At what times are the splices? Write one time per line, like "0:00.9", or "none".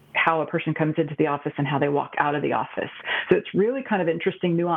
none